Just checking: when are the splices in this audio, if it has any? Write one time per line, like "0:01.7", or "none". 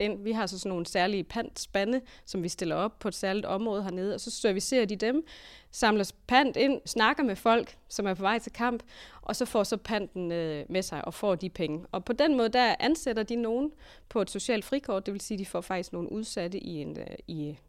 0:06.9